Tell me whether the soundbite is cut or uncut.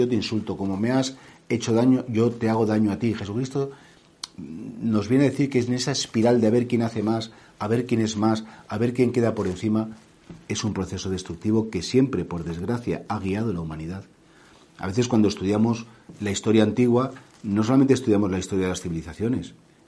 uncut